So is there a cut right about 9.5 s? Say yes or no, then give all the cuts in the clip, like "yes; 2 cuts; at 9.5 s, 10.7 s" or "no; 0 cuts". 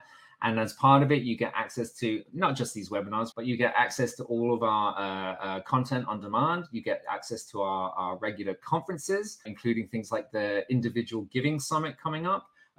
yes; 2 cuts; at 3.3 s, 9.5 s